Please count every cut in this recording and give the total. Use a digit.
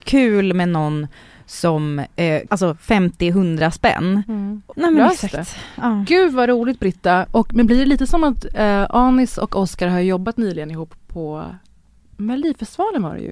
2